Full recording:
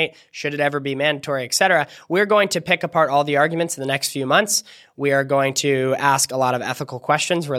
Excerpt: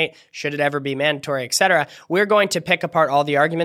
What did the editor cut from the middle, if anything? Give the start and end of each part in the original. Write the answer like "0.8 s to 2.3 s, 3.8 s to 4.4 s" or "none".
none